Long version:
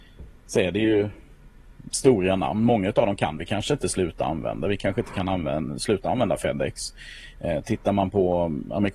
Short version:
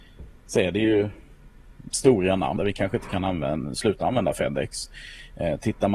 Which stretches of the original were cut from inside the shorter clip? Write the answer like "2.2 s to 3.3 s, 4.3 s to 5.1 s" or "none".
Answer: 2.6 s to 4.6 s